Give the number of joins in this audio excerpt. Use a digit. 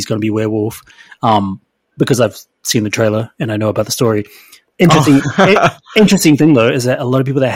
0